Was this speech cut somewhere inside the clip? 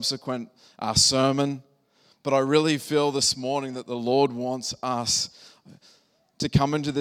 no; 0 cuts

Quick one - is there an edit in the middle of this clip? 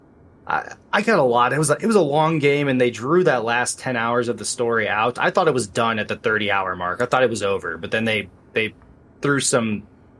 no; 0 cuts

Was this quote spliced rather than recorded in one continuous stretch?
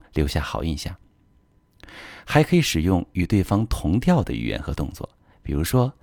no; 0 cuts

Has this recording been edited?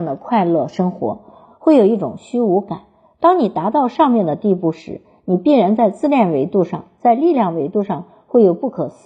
yes; 1 cut; at 1.4 s

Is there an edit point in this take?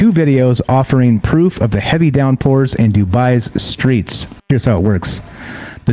yes; 1 cut; at 4.4 s

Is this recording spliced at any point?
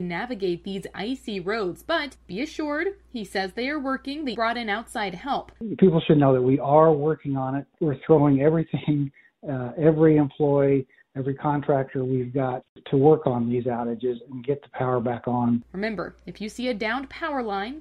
yes; 1 cut; at 4.3 s

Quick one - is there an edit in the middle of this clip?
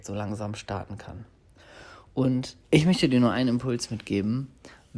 yes; 1 cut; at 2.6 s

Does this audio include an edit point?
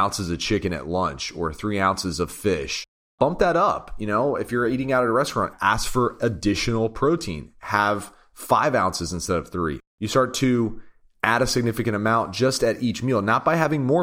no; 0 cuts

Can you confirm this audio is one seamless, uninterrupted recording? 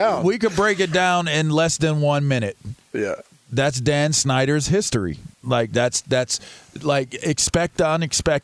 no; 1 cut; at 5.3 s

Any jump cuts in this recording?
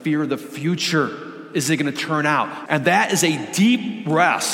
yes; 1 cut; at 2.7 s

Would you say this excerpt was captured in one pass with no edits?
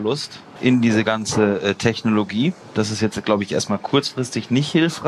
yes; 0 cuts

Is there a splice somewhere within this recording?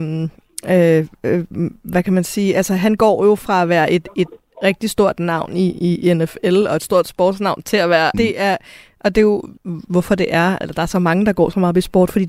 yes; 3 cuts; at 8.1 s, 9.6 s, 10.6 s

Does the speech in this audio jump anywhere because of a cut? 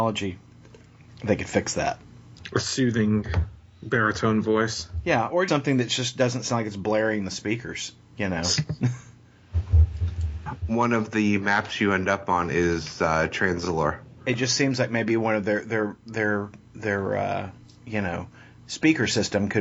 yes; 1 cut; at 5.5 s

